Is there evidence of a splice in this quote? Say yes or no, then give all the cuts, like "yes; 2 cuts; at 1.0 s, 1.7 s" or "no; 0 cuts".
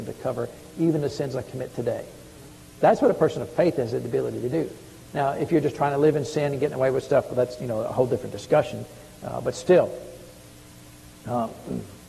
no; 0 cuts